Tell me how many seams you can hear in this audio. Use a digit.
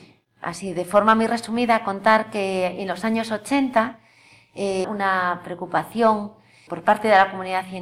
2